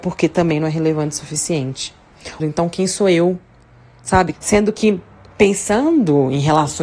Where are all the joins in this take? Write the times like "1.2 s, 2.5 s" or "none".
2.4 s, 4.3 s